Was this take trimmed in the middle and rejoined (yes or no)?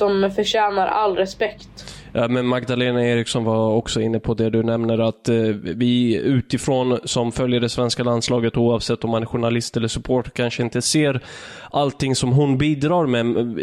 no